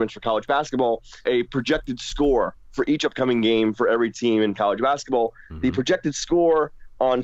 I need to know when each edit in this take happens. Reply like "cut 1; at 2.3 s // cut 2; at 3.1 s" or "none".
cut 1; at 1.2 s